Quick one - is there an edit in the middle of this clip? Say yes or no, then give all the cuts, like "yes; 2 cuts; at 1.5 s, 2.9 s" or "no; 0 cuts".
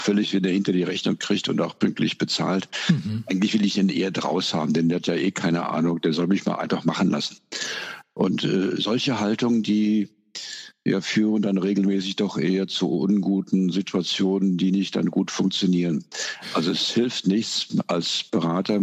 no; 0 cuts